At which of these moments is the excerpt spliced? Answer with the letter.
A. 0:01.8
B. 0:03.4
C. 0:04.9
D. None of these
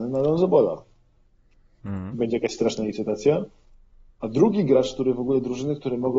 A